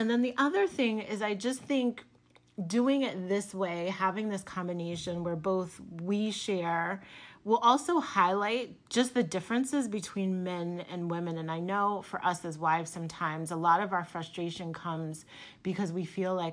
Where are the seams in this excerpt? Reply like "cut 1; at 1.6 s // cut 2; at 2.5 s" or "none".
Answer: none